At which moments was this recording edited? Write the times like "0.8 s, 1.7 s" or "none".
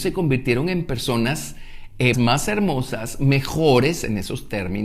2.1 s

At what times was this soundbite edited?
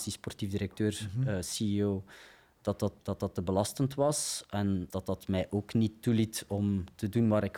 3.0 s, 4.9 s

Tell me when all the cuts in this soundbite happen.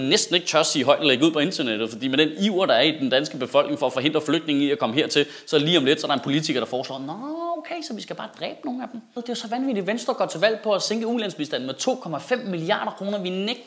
9.2 s

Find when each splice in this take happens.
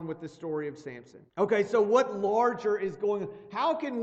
1.3 s

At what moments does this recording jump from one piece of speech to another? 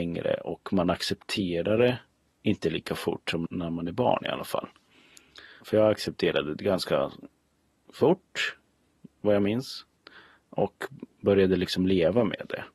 3.5 s

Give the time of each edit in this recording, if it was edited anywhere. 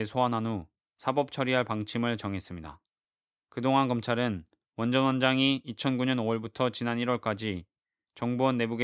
none

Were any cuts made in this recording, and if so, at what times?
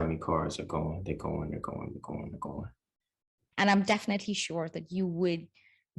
3.5 s

